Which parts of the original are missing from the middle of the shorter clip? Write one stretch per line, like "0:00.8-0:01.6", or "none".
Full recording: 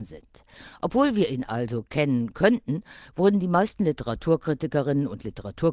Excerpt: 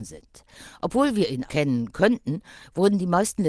0:01.5-0:01.9